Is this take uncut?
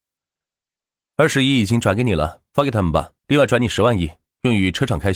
no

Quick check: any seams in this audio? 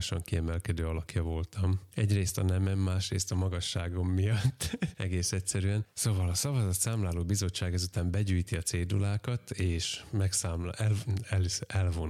no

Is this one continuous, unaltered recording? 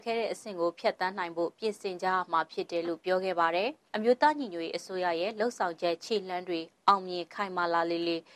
no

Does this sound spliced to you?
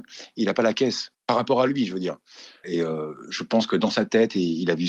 yes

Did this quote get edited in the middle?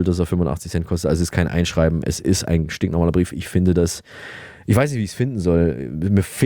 no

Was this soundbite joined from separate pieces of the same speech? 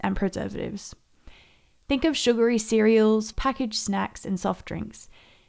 yes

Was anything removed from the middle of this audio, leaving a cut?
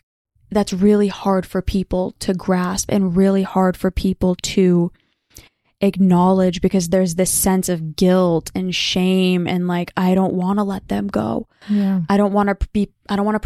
no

